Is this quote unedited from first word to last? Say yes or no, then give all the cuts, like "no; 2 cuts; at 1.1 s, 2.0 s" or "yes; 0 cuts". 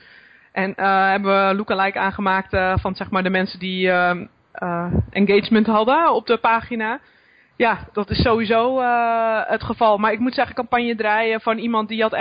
no; 2 cuts; at 7.5 s, 10.5 s